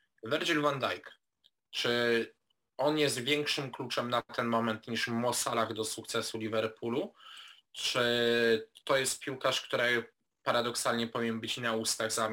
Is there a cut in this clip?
no; 0 cuts

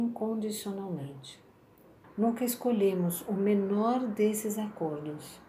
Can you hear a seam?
yes; 1 cut; at 2.0 s

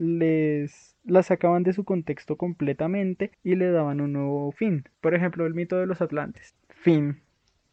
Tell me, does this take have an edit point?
yes; 3 cuts; at 3.3 s, 4.9 s, 6.5 s

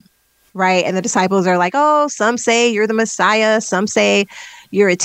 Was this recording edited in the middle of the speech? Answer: no; 0 cuts

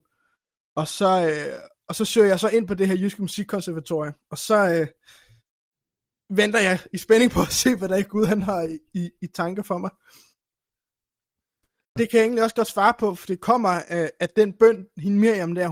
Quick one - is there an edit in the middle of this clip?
yes; 1 cut; at 11.8 s

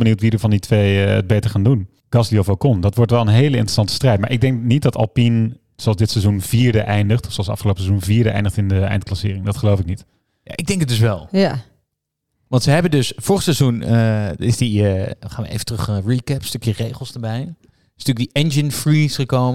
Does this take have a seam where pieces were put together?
no; 0 cuts

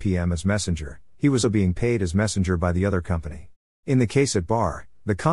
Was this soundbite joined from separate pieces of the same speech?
yes; 2 cuts; at 1.4 s, 3.8 s

